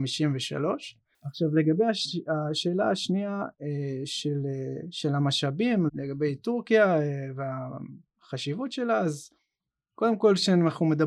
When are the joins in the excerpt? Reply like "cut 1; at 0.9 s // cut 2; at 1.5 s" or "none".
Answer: cut 1; at 5.9 s

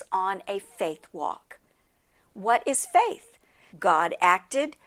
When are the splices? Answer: cut 1; at 3.7 s

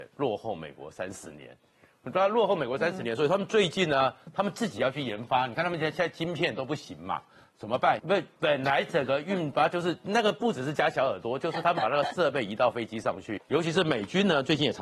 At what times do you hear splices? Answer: cut 1; at 8.0 s // cut 2; at 13.4 s

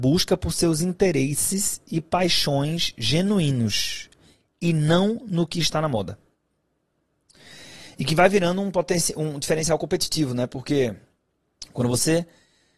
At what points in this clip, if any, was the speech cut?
none

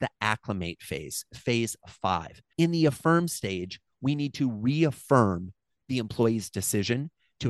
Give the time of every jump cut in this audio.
cut 1; at 2.5 s

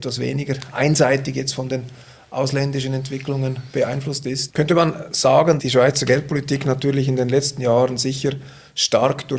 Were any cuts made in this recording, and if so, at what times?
cut 1; at 4.5 s // cut 2; at 5.6 s

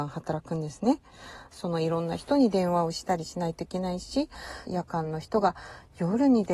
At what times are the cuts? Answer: cut 1; at 1.5 s // cut 2; at 4.7 s

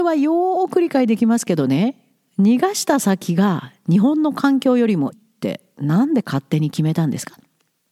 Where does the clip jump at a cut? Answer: cut 1; at 5.1 s

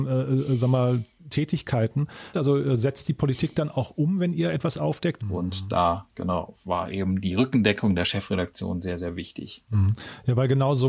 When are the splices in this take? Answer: cut 1; at 2.3 s // cut 2; at 5.2 s

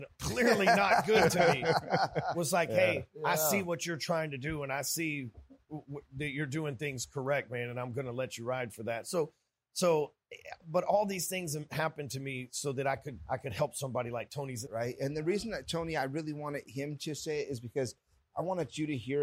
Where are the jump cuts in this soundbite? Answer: cut 1; at 14.7 s

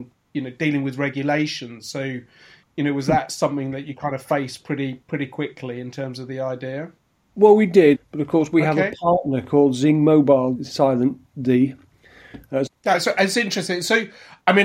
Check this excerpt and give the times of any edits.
cut 1; at 7.9 s // cut 2; at 10.5 s // cut 3; at 12.7 s

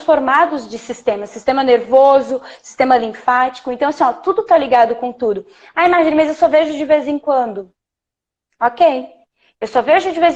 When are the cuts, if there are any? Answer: none

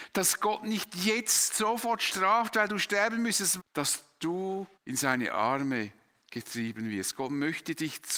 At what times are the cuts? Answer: cut 1; at 3.6 s // cut 2; at 4.7 s

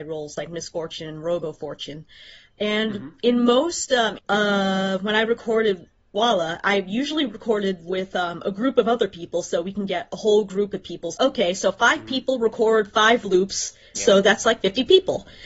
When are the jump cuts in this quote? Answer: cut 1; at 4.2 s // cut 2; at 11.1 s // cut 3; at 13.9 s

